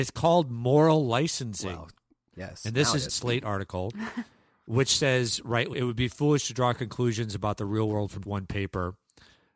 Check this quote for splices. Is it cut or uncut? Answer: cut